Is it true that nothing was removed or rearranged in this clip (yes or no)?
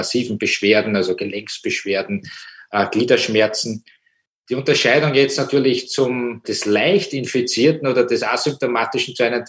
no